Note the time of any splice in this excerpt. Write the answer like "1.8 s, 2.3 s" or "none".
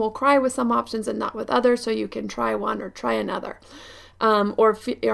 none